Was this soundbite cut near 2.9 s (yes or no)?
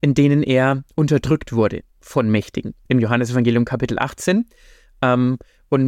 yes